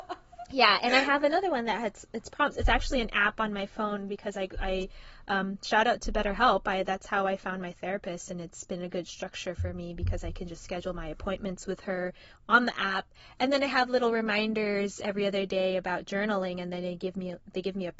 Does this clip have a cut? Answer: no; 0 cuts

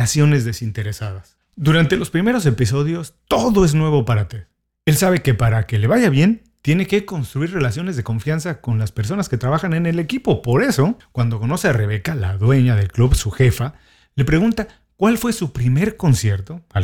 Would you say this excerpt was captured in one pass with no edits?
yes; 0 cuts

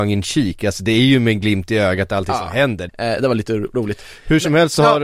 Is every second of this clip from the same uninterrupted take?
no; 1 cut; at 2.9 s

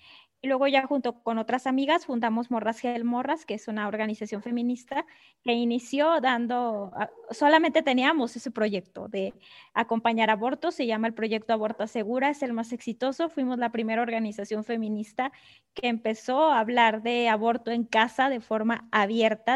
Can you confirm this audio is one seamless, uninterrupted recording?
yes; 0 cuts

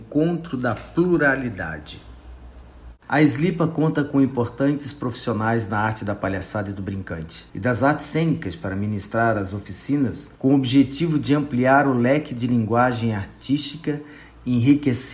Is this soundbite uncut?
no; 3 cuts; at 3.0 s, 7.5 s, 10.4 s

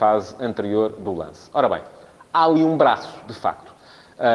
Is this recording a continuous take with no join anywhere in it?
yes; 0 cuts

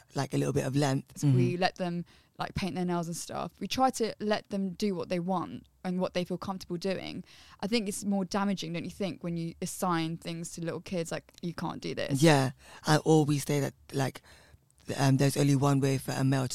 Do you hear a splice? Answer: yes; 1 cut; at 1.2 s

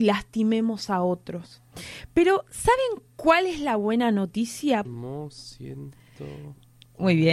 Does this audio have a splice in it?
yes; 1 cut; at 4.8 s

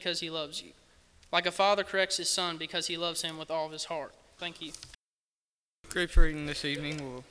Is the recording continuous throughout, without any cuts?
no; 1 cut; at 4.4 s

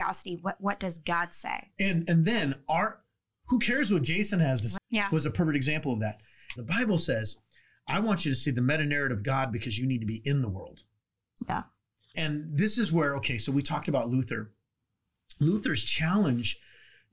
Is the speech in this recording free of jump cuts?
no; 3 cuts; at 4.8 s, 6.6 s, 12.1 s

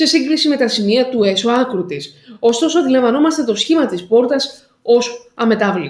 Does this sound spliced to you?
no; 0 cuts

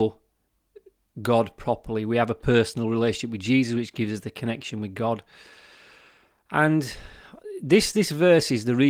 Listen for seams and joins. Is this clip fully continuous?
yes; 0 cuts

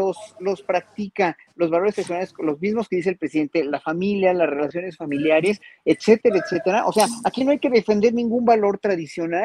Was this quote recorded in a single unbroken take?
yes; 0 cuts

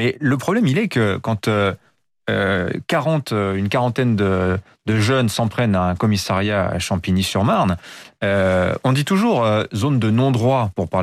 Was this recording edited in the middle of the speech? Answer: no; 0 cuts

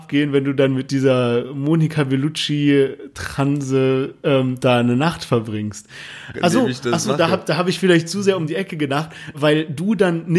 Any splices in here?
yes; 2 cuts; at 6.3 s, 9.3 s

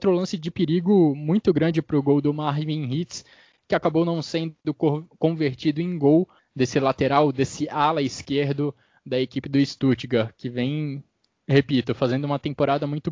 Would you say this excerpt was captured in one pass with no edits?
no; 1 cut; at 6.4 s

